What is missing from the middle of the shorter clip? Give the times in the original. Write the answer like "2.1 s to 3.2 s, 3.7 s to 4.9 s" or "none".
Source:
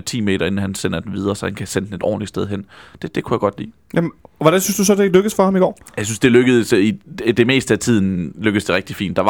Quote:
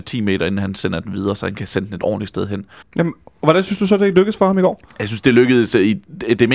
2.8 s to 3.8 s